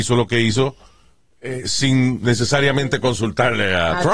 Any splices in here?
no; 0 cuts

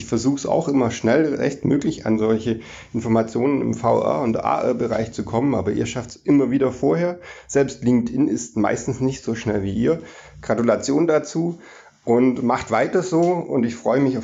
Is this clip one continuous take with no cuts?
yes; 0 cuts

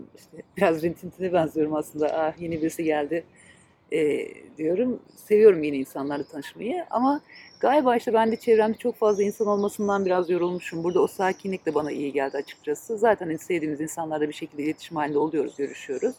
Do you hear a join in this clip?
no; 0 cuts

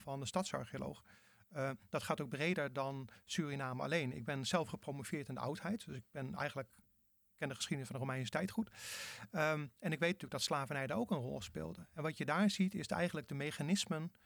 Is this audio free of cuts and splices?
yes; 0 cuts

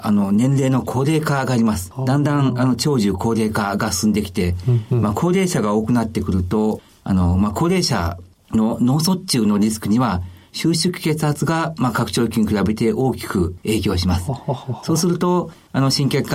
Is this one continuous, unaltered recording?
yes; 0 cuts

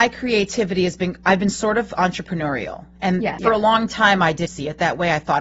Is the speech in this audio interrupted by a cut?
yes; 2 cuts; at 3.4 s, 4.5 s

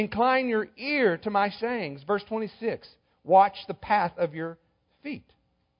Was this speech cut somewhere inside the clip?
no; 0 cuts

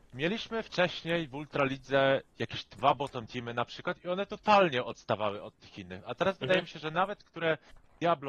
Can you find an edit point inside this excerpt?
no; 0 cuts

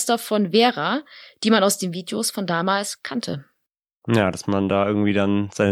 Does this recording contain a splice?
no; 0 cuts

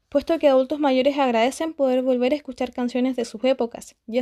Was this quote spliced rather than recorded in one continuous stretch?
no; 0 cuts

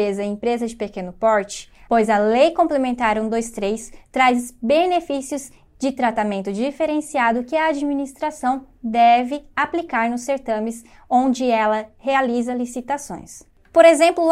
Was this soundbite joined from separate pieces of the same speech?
yes; 1 cut; at 1.9 s

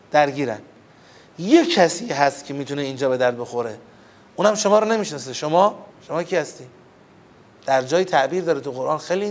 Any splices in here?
no; 0 cuts

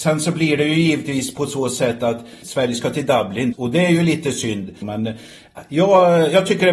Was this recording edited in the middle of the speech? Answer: yes; 3 cuts; at 2.4 s, 3.5 s, 4.8 s

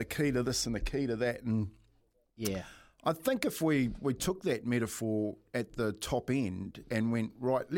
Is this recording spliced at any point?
no; 0 cuts

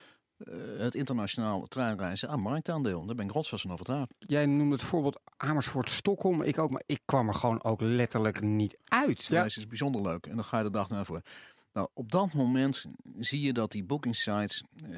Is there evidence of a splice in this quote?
yes; 1 cut; at 9.3 s

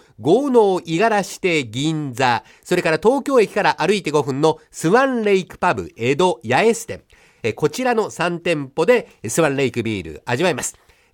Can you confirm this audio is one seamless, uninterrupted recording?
no; 1 cut; at 7.4 s

